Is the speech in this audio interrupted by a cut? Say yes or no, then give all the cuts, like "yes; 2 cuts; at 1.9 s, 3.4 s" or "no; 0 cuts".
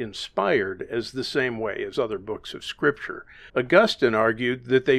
yes; 1 cut; at 3.5 s